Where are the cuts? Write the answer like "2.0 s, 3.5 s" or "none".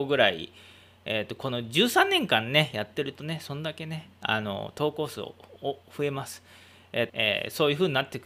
5.8 s, 7.1 s